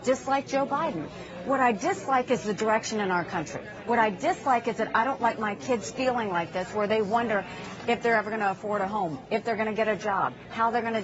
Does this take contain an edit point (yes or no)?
no